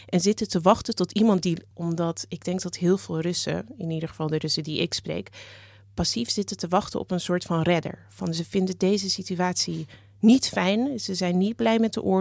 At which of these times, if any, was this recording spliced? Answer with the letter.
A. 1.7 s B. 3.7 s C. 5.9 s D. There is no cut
A